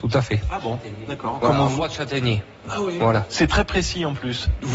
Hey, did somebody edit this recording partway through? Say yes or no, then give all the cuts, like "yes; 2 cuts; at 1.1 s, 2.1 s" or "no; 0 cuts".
no; 0 cuts